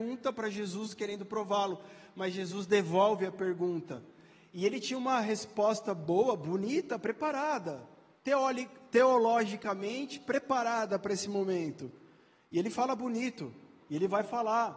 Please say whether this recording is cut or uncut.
cut